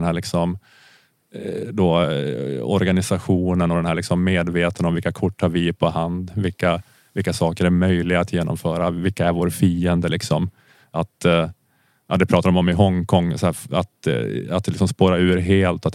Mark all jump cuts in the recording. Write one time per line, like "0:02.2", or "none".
none